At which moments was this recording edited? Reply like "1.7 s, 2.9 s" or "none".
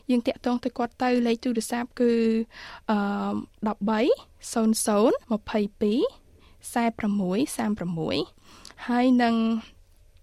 5.2 s